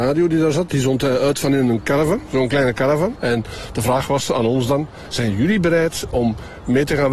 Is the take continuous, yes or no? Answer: no